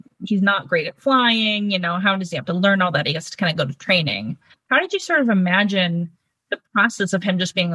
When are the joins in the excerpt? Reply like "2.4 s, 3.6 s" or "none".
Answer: none